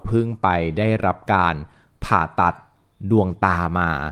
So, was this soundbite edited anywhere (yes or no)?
no